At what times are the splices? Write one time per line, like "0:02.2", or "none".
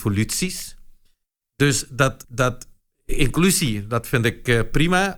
0:02.2